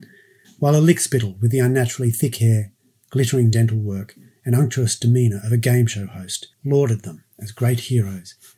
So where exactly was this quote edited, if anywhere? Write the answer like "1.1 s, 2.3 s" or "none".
6.5 s